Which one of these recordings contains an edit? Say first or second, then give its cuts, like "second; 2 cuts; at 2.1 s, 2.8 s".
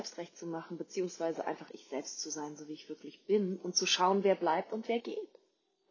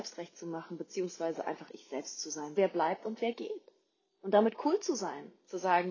second; 1 cut; at 2.6 s